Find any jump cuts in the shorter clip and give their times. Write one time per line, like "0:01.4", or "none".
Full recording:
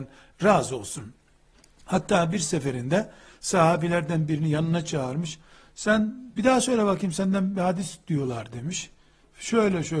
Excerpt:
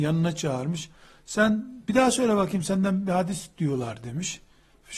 none